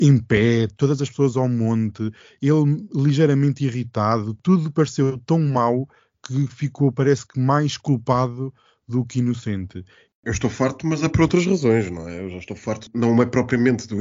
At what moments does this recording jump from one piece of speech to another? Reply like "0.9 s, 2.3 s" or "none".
10.0 s